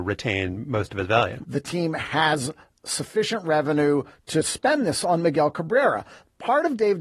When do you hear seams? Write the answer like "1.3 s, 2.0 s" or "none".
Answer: 1.4 s

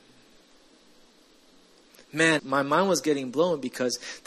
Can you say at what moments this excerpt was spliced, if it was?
2.4 s

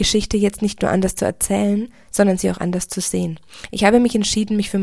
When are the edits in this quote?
none

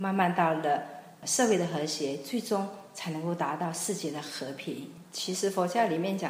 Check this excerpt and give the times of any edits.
5.0 s

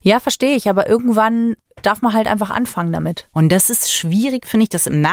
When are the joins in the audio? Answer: 3.3 s

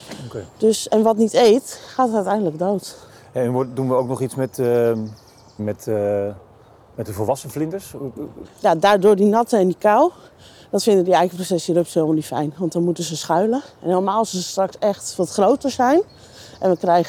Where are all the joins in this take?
5.6 s, 8.4 s

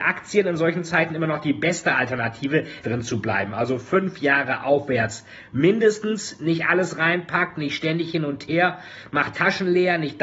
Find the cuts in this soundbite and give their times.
2.8 s

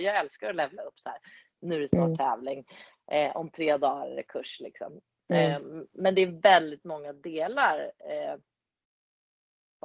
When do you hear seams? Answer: none

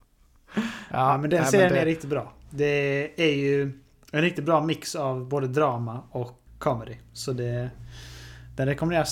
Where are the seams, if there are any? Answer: 6.5 s

